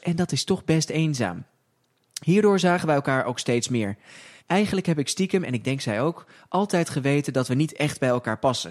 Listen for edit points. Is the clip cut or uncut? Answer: cut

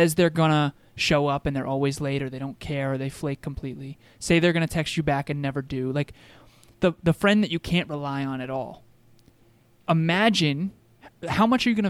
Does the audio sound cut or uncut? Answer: uncut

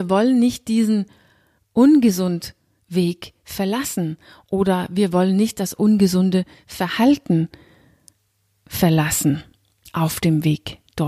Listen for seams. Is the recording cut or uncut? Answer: uncut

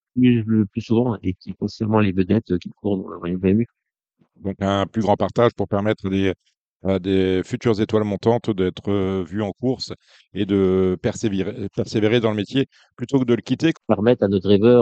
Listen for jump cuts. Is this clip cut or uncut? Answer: cut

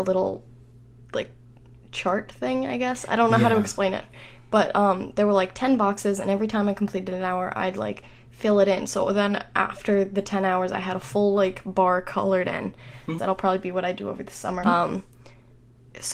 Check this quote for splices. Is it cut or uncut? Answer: cut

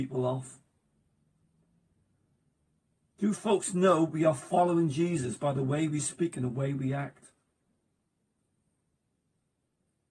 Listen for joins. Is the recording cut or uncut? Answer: uncut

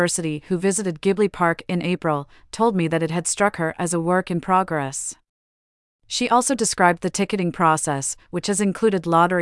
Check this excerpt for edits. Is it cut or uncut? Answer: uncut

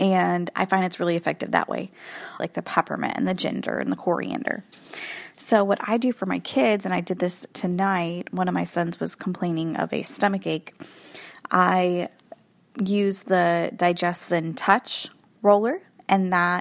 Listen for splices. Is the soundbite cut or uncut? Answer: cut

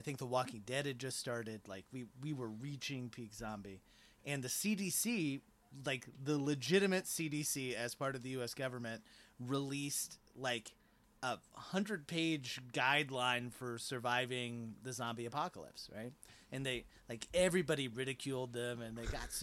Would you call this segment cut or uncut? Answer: uncut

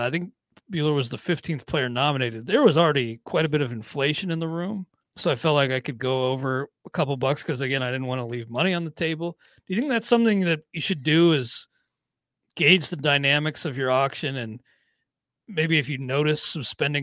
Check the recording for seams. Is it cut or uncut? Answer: cut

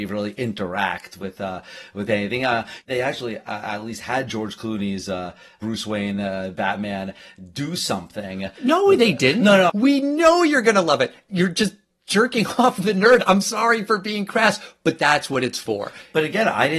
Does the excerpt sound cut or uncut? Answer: cut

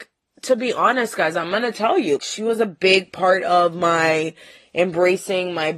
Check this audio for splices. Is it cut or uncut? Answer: cut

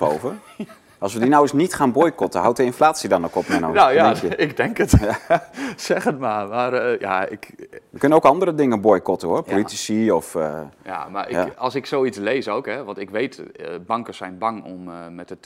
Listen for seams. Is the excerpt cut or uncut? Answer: uncut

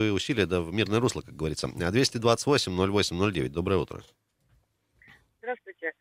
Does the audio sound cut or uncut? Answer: uncut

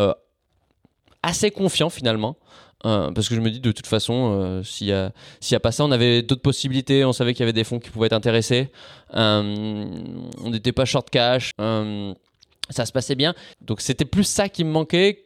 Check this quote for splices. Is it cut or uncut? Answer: cut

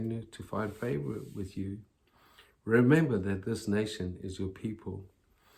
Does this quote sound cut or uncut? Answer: uncut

